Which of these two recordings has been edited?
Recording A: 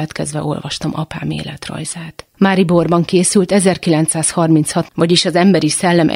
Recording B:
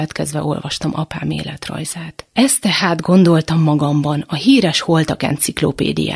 A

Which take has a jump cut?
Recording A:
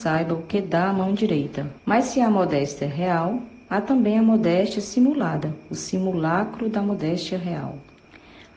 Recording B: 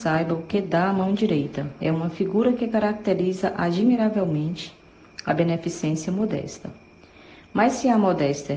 A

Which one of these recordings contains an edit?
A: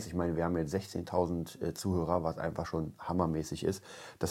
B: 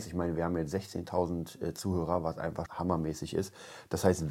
B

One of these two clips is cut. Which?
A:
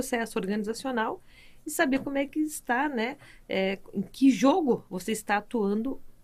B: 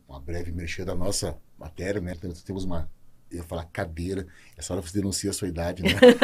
B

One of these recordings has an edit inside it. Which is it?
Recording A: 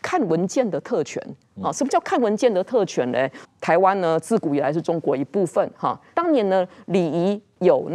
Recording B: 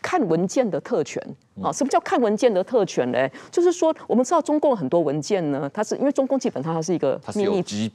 A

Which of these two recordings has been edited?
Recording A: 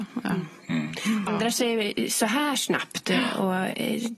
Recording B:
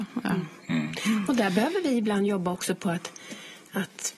A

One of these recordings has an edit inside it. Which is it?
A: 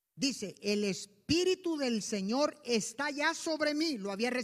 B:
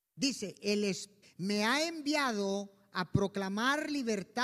B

